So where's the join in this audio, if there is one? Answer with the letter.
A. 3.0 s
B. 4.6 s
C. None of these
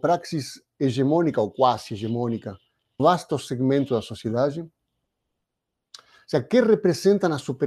A